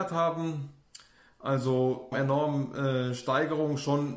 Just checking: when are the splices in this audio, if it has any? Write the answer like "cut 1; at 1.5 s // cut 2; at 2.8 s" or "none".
cut 1; at 2.1 s

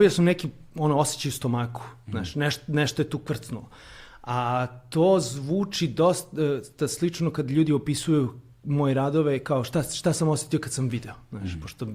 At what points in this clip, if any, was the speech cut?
none

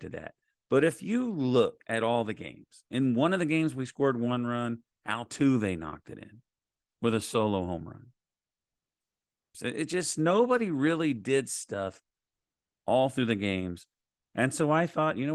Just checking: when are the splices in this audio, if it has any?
cut 1; at 9.5 s

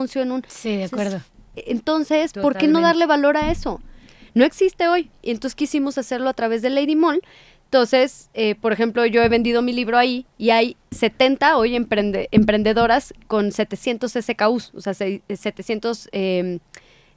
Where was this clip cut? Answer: none

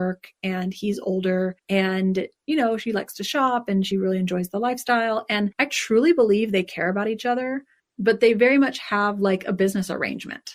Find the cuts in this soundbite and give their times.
none

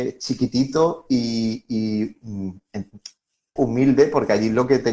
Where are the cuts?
cut 1; at 3.6 s

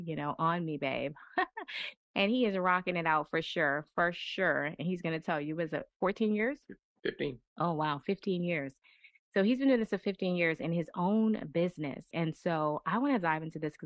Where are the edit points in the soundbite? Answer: cut 1; at 7.5 s // cut 2; at 12.1 s

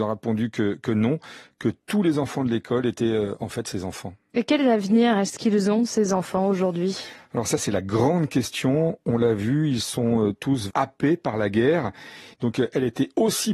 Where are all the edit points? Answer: cut 1; at 10.7 s // cut 2; at 12.3 s

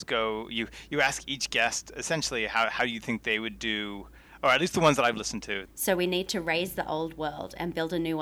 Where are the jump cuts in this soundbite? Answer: cut 1; at 5.7 s

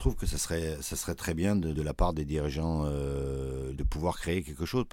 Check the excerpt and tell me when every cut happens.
cut 1; at 1.8 s // cut 2; at 3.8 s

